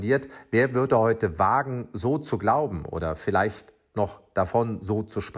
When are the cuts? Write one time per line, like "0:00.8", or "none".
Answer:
none